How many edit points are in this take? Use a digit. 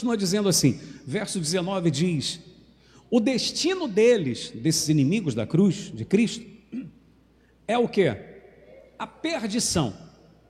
0